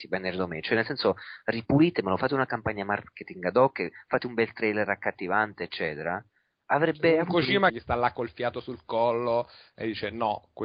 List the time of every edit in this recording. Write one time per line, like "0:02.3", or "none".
0:07.7